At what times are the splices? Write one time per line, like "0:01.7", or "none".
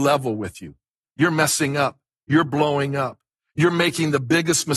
0:01.0